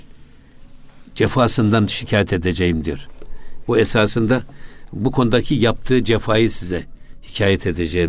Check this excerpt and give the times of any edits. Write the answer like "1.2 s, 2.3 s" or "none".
3.6 s